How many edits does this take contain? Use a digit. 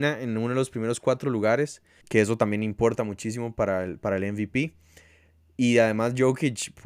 1